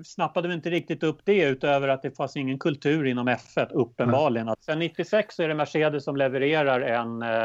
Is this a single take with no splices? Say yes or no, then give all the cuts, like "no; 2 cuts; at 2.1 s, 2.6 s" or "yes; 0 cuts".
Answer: no; 1 cut; at 4.5 s